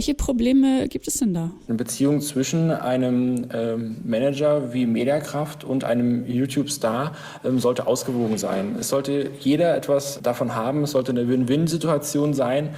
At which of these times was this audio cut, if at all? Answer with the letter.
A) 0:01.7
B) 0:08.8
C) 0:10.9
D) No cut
A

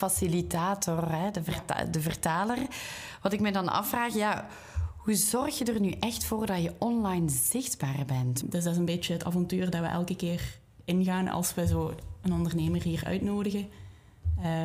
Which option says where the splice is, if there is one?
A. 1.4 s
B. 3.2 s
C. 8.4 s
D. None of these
C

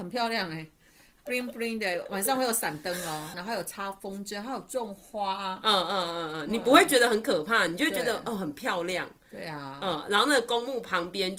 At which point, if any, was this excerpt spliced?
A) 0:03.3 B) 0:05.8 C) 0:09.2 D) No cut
A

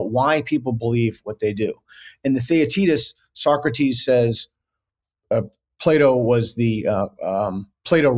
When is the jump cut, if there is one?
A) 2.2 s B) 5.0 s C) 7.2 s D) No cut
D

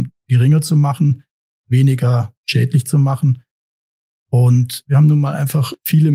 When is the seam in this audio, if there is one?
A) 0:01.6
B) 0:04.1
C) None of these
C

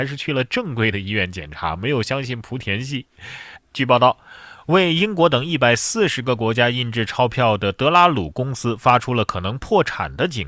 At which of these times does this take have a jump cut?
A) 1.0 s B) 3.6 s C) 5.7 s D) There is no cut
B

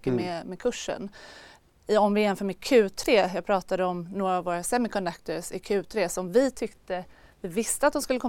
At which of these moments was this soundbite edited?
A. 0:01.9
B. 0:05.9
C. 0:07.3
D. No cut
D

